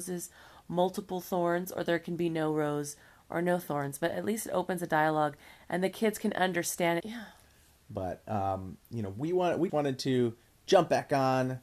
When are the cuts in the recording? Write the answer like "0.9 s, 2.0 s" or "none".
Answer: 7.0 s, 9.7 s